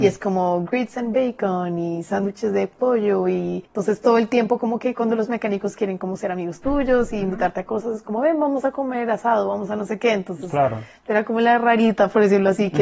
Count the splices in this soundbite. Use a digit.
0